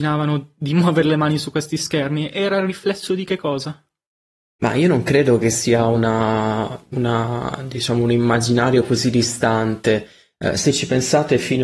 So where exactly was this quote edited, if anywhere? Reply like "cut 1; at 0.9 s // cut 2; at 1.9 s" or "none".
none